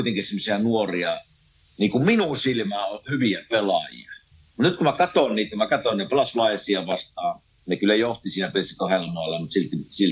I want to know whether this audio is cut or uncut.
uncut